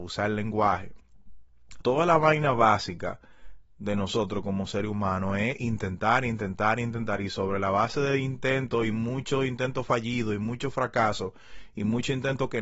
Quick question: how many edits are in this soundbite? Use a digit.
1